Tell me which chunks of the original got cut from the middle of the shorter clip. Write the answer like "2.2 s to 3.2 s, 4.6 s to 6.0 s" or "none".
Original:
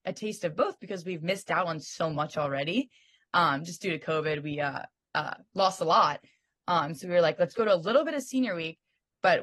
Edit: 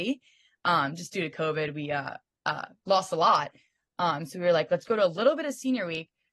none